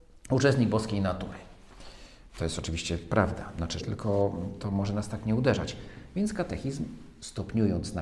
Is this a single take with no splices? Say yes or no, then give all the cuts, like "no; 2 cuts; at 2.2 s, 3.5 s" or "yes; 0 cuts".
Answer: no; 1 cut; at 3.8 s